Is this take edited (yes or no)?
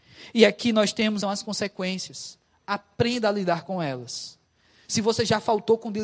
yes